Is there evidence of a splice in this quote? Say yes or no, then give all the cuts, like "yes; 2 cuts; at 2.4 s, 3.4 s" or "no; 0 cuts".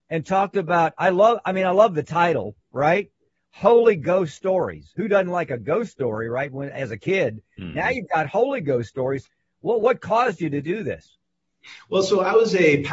no; 0 cuts